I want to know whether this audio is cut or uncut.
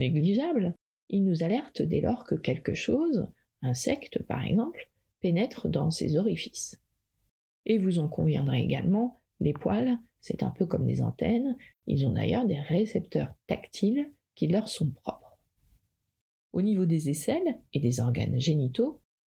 cut